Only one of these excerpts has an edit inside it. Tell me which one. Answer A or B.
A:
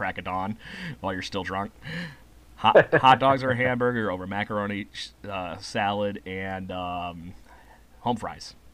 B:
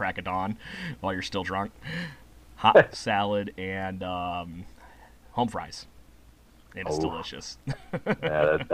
B